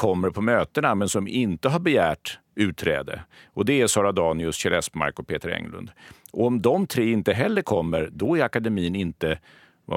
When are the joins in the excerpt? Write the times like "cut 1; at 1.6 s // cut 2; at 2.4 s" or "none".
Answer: cut 1; at 2.4 s